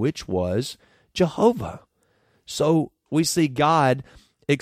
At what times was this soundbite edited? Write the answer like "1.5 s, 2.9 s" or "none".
3.1 s